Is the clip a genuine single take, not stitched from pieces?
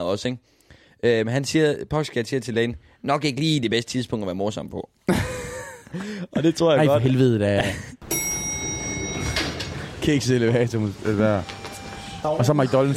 yes; 0 cuts

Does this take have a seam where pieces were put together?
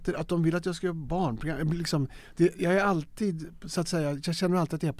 no; 0 cuts

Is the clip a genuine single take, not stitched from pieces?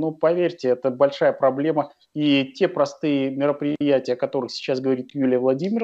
no; 1 cut; at 2.1 s

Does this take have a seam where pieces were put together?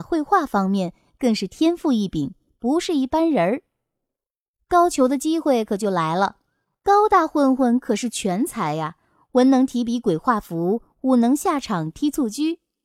no; 0 cuts

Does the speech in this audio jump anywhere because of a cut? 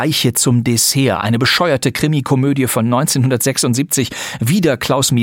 no; 0 cuts

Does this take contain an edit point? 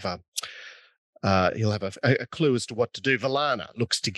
no; 0 cuts

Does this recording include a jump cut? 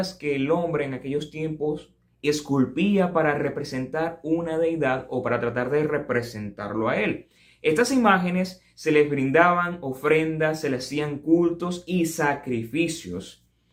no; 0 cuts

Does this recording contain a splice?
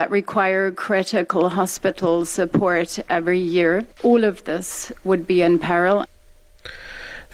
no; 0 cuts

